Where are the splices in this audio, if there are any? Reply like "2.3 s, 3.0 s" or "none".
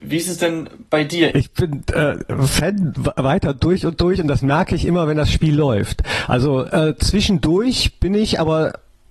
1.3 s